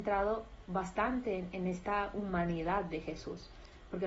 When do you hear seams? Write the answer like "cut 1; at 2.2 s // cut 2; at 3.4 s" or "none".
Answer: none